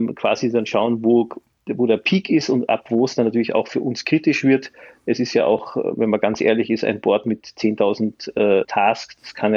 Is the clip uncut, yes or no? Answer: no